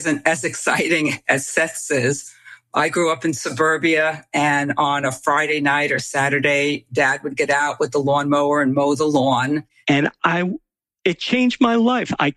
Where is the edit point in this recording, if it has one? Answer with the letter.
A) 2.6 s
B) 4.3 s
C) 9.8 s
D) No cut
C